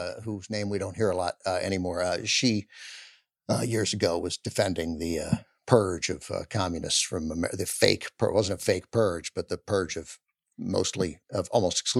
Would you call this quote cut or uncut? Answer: uncut